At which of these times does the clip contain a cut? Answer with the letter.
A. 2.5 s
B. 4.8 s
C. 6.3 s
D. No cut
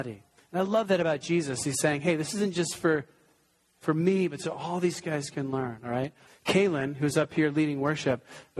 C